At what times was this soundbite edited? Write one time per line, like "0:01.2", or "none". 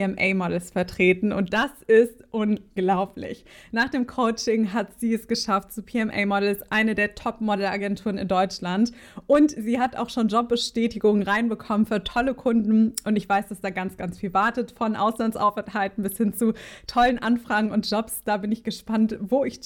none